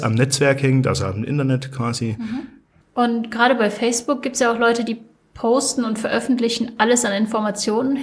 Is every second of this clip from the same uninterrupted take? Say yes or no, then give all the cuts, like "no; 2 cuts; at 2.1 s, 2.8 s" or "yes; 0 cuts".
no; 1 cut; at 2.8 s